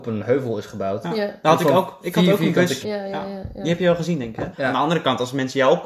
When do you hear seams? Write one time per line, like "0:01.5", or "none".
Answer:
0:02.8
0:04.5